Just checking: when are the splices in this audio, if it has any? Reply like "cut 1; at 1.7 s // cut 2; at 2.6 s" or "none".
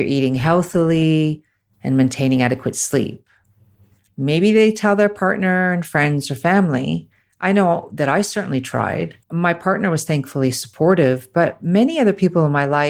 cut 1; at 4.1 s // cut 2; at 9.2 s